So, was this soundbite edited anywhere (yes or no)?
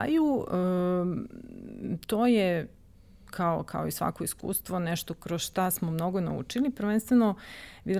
no